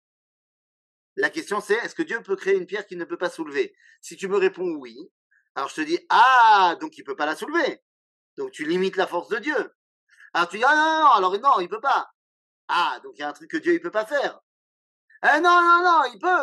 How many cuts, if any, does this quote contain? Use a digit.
0